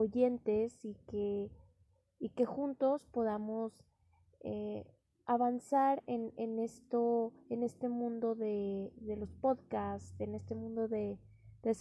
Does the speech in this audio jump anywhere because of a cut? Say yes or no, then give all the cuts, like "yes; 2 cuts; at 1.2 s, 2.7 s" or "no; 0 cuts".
no; 0 cuts